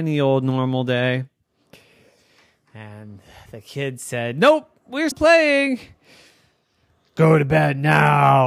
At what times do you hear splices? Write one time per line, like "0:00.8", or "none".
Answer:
0:05.1